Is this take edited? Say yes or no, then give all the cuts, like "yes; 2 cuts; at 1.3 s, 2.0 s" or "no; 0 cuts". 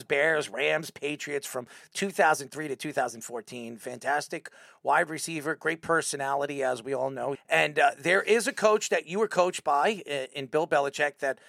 yes; 1 cut; at 7.3 s